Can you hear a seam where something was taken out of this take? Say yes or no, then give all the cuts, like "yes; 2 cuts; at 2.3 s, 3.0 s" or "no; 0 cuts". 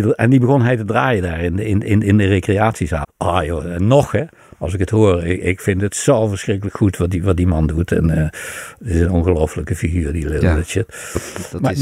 yes; 1 cut; at 3.0 s